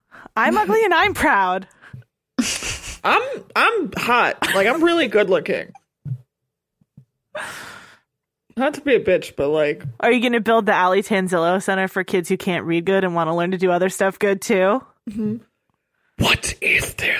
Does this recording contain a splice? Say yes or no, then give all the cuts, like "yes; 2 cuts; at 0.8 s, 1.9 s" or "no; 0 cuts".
no; 0 cuts